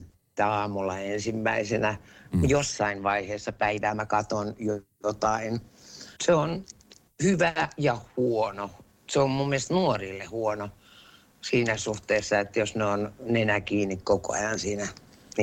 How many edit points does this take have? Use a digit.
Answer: 1